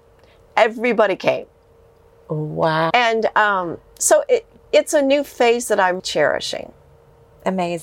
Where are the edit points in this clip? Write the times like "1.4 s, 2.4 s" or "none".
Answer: 2.9 s, 6.0 s